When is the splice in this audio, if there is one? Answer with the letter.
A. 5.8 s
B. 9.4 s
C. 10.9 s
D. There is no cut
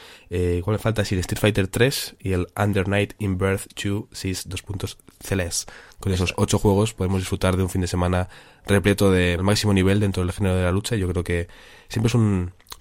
B